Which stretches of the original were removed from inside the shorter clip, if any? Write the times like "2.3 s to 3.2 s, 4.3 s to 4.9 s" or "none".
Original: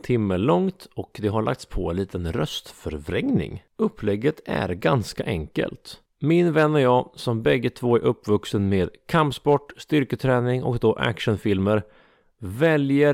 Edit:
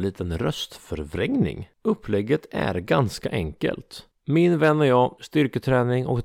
7.1 s to 9.7 s

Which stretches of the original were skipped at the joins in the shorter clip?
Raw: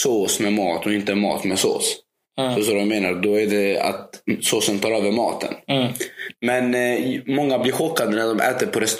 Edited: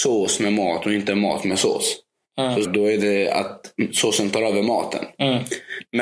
2.6 s to 3.1 s

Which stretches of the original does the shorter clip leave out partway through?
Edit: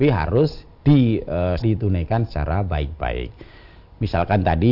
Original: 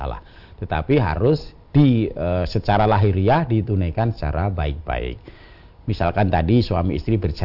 2.5 s to 3.5 s

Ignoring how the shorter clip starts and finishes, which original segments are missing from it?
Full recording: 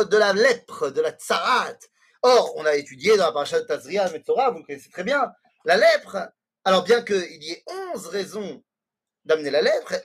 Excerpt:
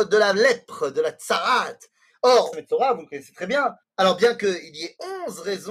2.5 s to 4.1 s, 5.4 s to 6.5 s

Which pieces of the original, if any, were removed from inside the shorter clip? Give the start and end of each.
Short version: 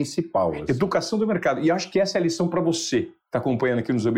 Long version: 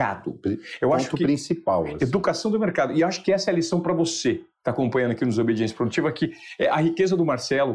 none

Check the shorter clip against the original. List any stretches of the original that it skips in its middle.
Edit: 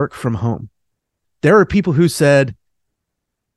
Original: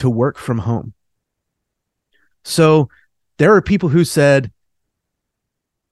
1.5 s to 3.2 s

